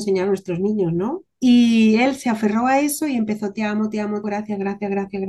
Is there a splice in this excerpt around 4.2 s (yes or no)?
yes